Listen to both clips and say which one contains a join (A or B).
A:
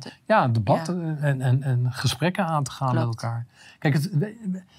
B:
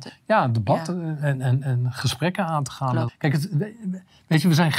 B